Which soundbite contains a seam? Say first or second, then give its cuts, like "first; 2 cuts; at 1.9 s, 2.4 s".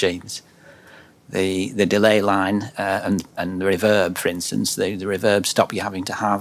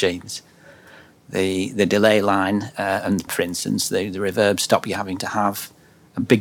second; 1 cut; at 3.3 s